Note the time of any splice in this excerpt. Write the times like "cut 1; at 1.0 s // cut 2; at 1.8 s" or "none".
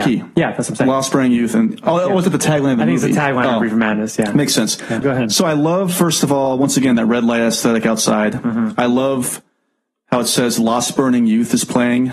cut 1; at 5.0 s